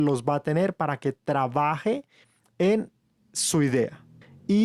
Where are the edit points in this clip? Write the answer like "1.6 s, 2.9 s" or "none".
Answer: none